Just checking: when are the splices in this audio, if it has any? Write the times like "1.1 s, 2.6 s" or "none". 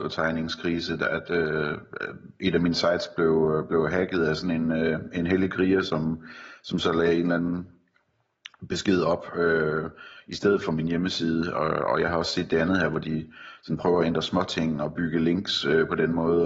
none